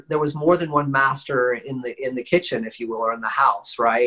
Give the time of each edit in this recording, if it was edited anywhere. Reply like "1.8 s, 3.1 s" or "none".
none